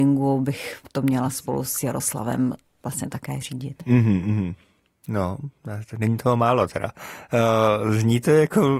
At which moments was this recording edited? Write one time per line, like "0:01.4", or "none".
none